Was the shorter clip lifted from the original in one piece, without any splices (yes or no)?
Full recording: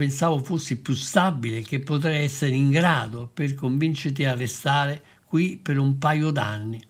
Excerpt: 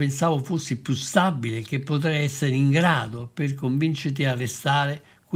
yes